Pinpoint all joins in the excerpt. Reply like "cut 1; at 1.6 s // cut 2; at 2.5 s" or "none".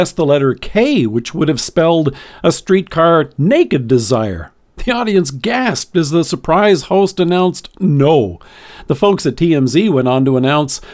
none

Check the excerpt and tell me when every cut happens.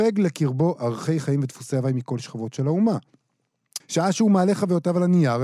cut 1; at 3.8 s

